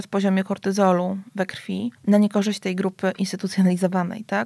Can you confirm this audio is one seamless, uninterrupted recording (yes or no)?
no